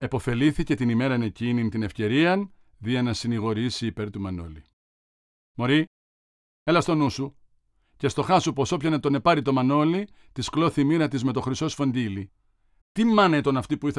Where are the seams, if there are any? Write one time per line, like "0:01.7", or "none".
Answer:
0:12.8